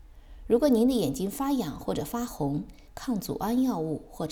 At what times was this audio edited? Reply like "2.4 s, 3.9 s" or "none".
2.9 s